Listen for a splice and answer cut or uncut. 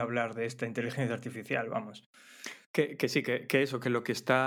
uncut